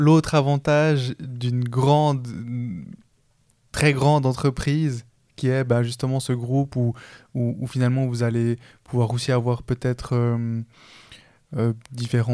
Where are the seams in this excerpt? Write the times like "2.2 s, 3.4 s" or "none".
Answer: none